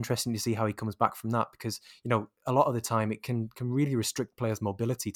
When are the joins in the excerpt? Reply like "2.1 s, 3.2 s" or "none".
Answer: none